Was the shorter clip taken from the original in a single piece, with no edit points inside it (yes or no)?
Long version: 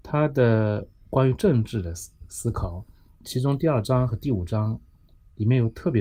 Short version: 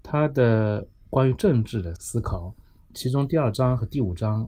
no